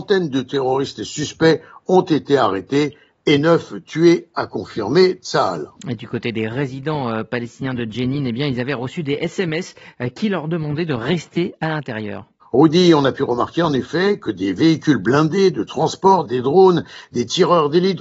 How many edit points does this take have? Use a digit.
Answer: 2